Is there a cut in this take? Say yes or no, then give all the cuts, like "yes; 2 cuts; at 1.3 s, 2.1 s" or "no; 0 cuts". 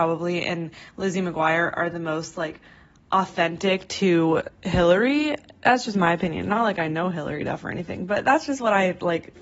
no; 0 cuts